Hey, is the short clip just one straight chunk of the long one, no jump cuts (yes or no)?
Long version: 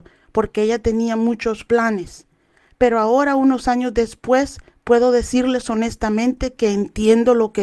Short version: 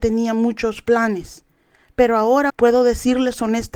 no